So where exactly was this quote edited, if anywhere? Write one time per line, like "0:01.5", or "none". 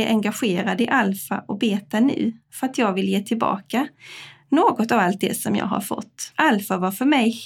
0:06.3